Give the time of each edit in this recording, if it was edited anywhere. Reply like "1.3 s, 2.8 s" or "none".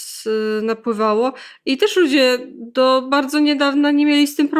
none